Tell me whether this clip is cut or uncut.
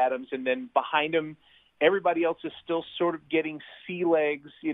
uncut